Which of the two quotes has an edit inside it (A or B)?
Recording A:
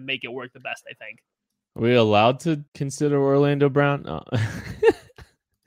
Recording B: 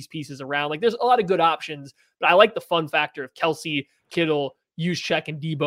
A